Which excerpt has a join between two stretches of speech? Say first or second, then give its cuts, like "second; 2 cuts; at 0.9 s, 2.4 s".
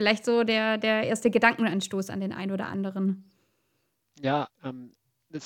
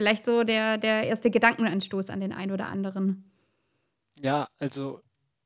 first; 1 cut; at 4.5 s